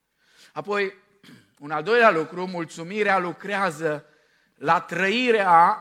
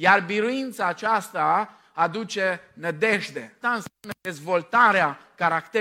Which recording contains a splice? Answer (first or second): second